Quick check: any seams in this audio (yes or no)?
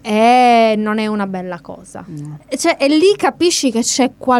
yes